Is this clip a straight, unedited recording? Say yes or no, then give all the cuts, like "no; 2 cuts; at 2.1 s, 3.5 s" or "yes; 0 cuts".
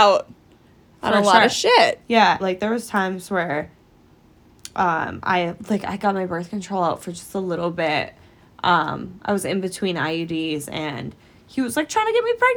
no; 1 cut; at 2.4 s